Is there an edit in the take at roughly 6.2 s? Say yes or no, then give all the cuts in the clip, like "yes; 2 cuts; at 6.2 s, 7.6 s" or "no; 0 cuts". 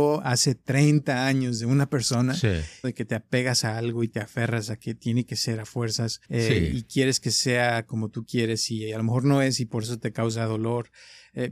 yes; 2 cuts; at 2.8 s, 6.2 s